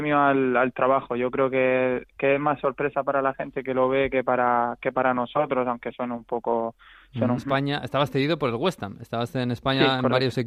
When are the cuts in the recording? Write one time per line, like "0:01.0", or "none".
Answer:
0:07.4